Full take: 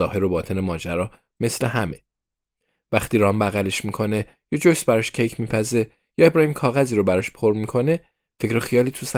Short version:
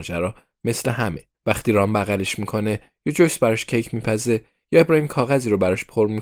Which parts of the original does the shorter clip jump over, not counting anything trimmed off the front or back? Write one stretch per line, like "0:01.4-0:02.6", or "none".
0:02.1-0:02.8